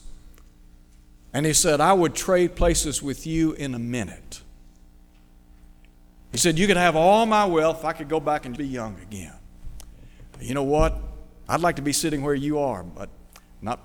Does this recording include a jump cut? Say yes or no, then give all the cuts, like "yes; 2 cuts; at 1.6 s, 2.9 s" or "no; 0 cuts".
yes; 2 cuts; at 8.6 s, 11.5 s